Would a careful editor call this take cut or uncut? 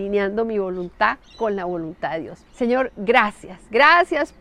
cut